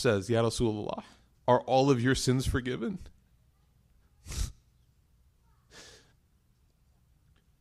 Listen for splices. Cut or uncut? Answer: cut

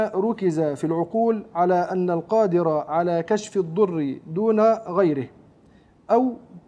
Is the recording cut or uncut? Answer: uncut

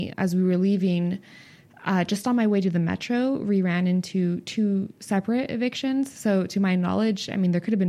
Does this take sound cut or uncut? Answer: uncut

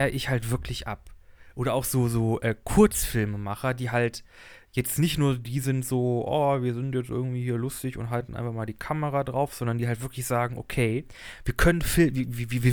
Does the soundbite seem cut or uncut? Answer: uncut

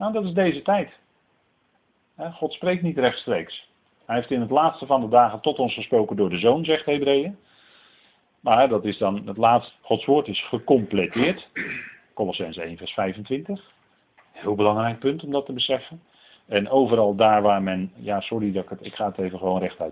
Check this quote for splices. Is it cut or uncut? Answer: cut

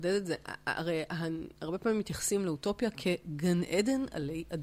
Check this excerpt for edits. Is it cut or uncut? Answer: uncut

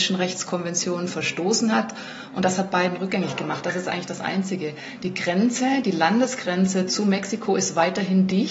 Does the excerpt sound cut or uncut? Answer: uncut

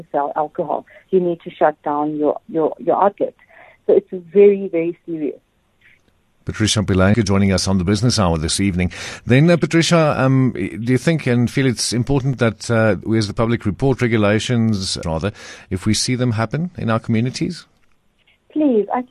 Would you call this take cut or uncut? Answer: cut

